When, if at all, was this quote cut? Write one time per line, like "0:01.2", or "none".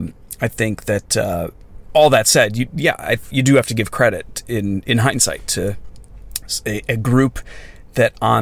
0:03.3